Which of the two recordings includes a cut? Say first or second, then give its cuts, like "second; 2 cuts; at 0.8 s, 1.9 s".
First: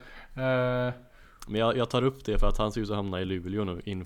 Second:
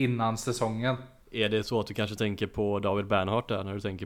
second; 1 cut; at 1.2 s